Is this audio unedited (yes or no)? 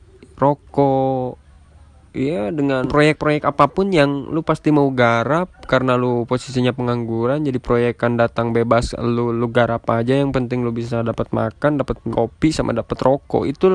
yes